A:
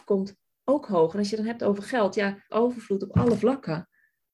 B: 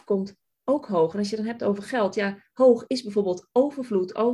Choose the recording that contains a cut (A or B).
A